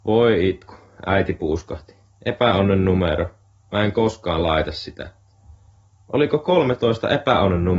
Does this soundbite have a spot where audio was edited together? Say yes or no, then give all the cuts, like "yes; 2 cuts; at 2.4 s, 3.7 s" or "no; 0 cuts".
no; 0 cuts